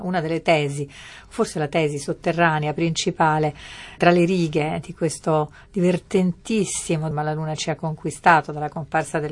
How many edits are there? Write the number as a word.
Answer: two